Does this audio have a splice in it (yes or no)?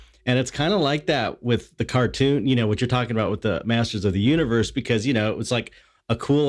yes